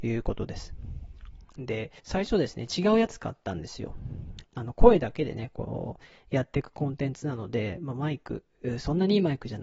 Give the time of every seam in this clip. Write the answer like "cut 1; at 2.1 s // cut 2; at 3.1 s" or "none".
cut 1; at 2.0 s // cut 2; at 4.4 s